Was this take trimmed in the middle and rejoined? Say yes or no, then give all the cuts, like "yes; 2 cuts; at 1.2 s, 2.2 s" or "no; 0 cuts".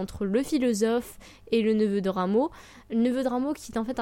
no; 0 cuts